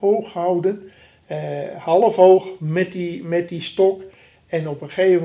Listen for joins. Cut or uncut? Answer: uncut